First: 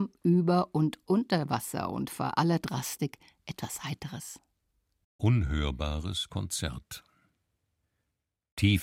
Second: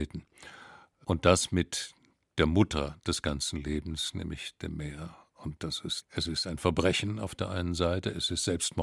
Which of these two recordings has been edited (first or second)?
second